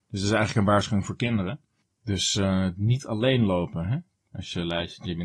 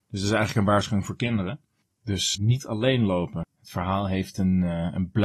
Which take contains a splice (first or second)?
second